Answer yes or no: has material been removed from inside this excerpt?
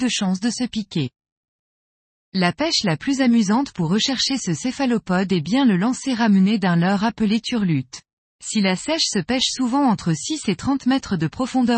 yes